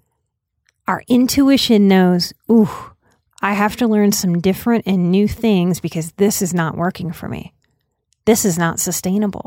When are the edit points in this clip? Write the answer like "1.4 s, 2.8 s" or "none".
none